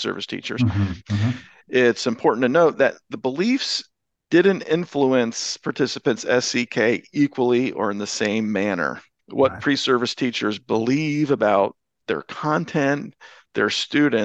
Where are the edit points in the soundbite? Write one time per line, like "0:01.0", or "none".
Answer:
0:01.0
0:09.2